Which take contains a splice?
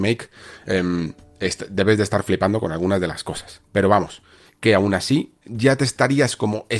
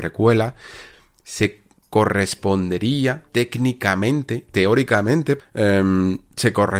second; 2 cuts; at 3.3 s, 5.4 s

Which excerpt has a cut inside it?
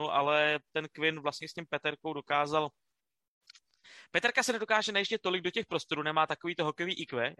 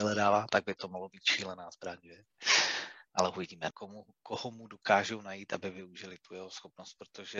second; 1 cut; at 3.7 s

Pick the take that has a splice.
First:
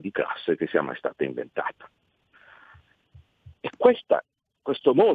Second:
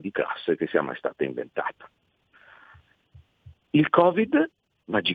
first; 1 cut; at 3.6 s

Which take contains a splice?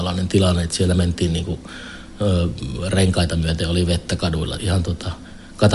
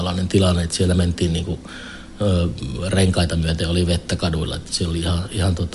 first; 1 cut; at 4.6 s

